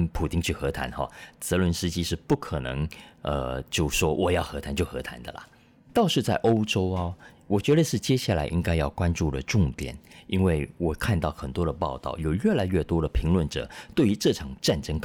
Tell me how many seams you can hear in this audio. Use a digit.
0